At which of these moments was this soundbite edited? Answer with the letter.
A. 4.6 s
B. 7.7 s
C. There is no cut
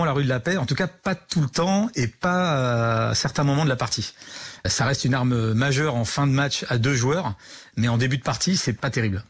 C